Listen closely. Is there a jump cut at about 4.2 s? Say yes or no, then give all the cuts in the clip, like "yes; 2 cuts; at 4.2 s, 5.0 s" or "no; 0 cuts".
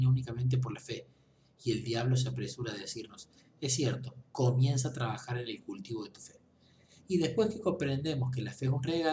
yes; 1 cut; at 4.2 s